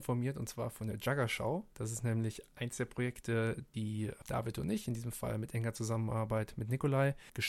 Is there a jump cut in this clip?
yes; 1 cut; at 1.7 s

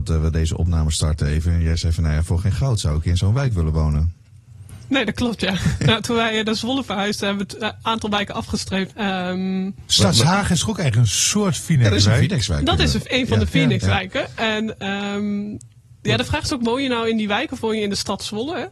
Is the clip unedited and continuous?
no; 1 cut; at 8.9 s

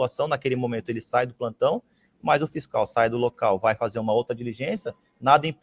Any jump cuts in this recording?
no; 0 cuts

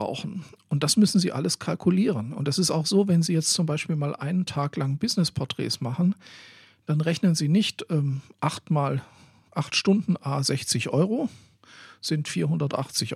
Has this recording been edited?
no; 0 cuts

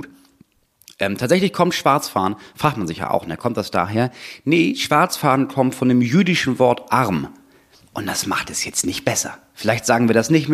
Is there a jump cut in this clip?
no; 0 cuts

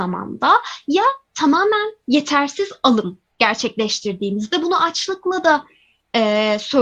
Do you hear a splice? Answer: no; 0 cuts

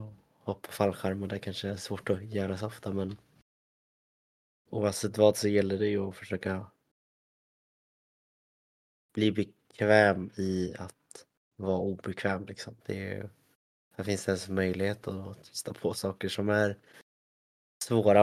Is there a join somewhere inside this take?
yes; 1 cut; at 12.8 s

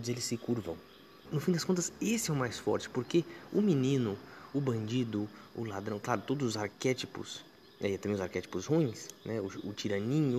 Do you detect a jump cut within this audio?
yes; 1 cut; at 1.2 s

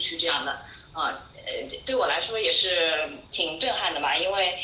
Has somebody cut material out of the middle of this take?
yes; 1 cut; at 3.3 s

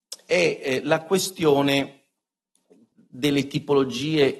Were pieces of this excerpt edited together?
yes; 1 cut; at 2.9 s

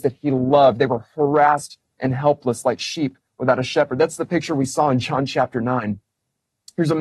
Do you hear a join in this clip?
no; 0 cuts

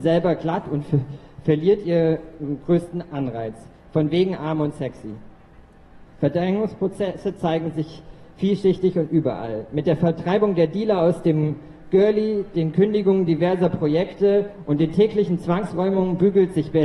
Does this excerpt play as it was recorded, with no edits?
no; 1 cut; at 6.1 s

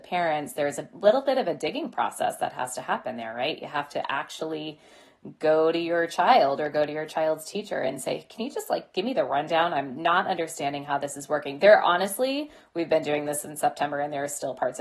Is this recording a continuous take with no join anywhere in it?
yes; 0 cuts

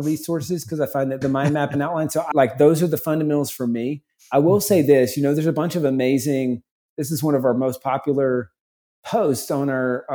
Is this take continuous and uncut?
no; 2 cuts; at 1.2 s, 2.3 s

